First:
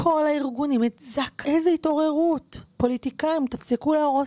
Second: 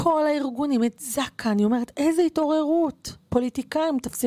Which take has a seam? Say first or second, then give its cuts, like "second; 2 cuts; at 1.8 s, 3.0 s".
first; 1 cut; at 1.4 s